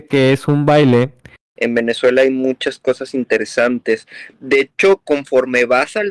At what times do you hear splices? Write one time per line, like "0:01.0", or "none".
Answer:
0:01.4